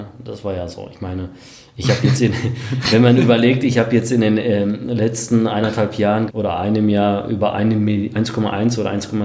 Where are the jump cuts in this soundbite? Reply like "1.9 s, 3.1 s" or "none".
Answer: 6.3 s